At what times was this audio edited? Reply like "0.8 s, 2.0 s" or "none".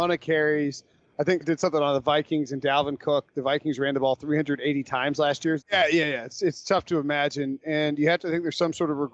1.4 s, 5.6 s